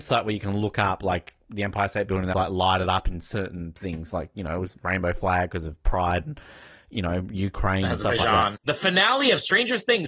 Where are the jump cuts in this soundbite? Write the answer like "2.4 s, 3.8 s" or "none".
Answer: 2.3 s, 8.5 s